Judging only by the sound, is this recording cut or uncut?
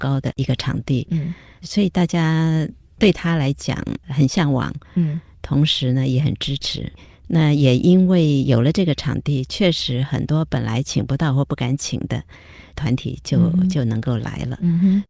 cut